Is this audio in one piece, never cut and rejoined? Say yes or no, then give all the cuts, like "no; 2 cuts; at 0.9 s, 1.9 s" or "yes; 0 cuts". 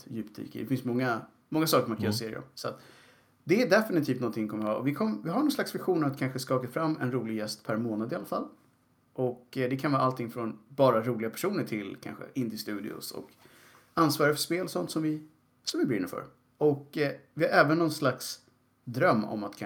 yes; 0 cuts